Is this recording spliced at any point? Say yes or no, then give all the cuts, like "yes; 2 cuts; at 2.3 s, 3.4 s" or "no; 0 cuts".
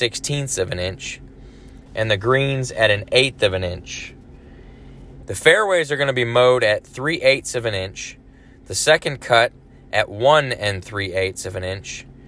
yes; 2 cuts; at 1.9 s, 5.2 s